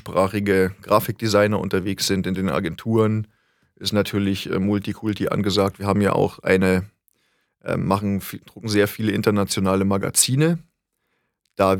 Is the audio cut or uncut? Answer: uncut